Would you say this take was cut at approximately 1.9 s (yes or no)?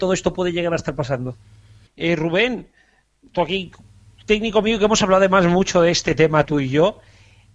yes